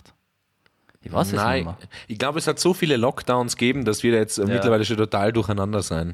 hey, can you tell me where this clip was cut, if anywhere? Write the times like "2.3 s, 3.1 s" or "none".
none